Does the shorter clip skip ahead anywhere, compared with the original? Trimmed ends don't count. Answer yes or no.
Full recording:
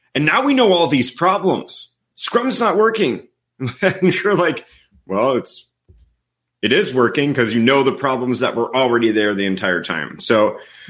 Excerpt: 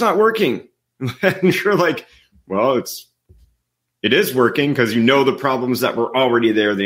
no